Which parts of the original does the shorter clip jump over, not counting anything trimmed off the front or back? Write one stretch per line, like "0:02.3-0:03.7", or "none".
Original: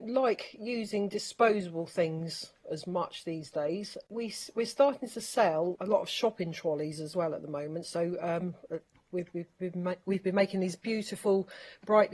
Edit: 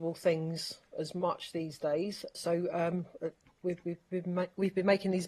0:04.1-0:07.8